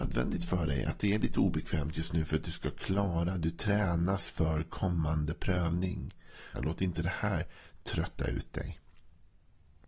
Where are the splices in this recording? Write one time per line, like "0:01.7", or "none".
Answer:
0:06.5